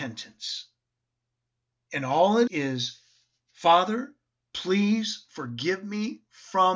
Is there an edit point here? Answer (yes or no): yes